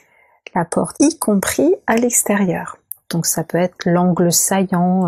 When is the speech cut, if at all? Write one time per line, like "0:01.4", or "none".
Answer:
0:00.9
0:03.1

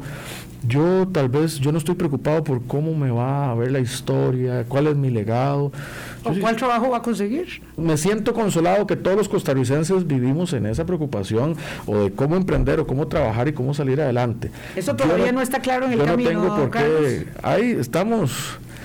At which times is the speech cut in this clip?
0:07.8

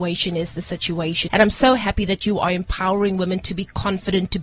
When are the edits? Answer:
0:01.3

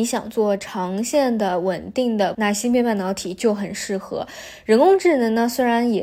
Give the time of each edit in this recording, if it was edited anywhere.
0:02.3

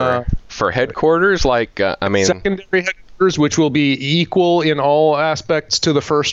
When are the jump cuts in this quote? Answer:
none

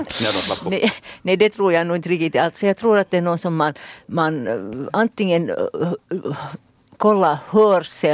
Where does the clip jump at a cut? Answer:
none

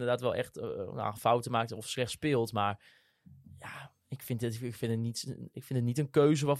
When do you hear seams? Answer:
none

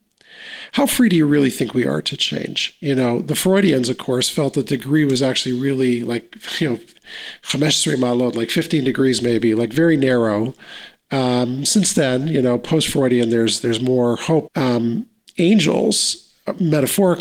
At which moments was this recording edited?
0:14.5

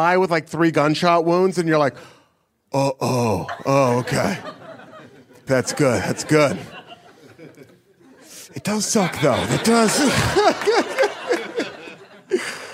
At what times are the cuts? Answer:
0:05.5

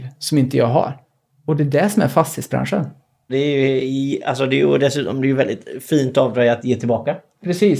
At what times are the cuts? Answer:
0:03.3

